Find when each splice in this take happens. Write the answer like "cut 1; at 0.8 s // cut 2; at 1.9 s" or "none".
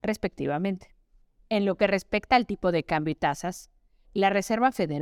cut 1; at 4.0 s